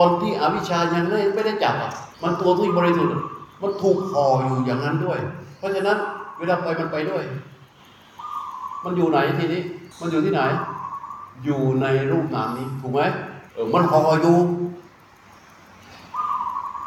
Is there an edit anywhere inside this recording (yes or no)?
yes